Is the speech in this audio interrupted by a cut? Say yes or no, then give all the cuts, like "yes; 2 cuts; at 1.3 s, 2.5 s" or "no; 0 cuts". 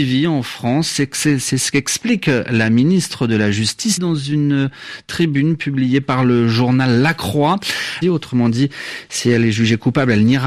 yes; 2 cuts; at 4.0 s, 8.0 s